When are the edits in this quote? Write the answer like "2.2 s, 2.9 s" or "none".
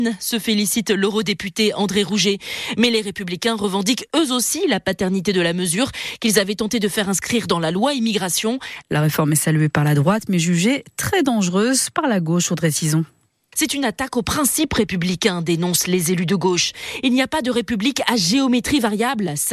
8.8 s